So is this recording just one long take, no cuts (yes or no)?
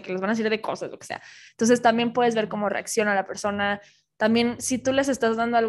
yes